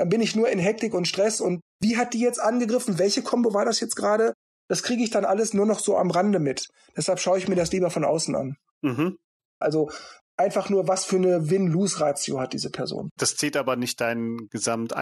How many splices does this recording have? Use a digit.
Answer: 3